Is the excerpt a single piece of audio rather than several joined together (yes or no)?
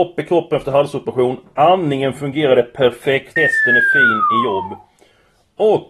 no